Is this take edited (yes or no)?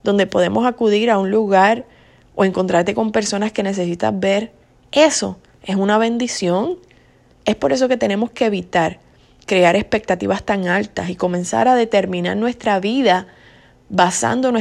no